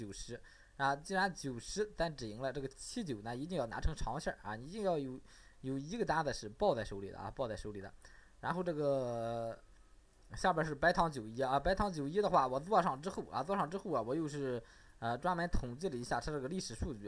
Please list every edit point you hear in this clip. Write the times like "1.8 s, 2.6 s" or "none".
none